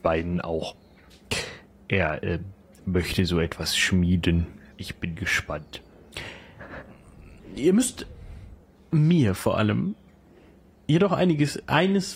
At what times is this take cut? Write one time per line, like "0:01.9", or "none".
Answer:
0:04.7